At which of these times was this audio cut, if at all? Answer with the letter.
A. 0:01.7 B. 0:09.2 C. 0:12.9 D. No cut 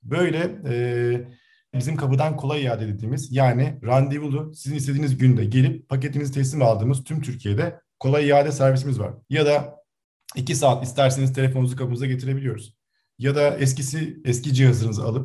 A